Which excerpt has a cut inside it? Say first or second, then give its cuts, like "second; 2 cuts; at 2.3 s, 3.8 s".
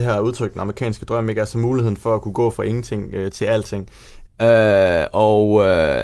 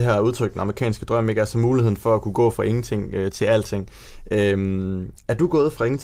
first; 1 cut; at 4.3 s